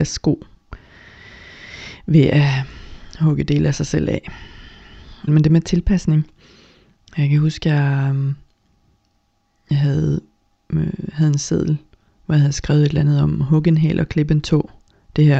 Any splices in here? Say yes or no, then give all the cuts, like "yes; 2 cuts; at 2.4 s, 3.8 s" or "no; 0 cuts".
yes; 1 cut; at 5.3 s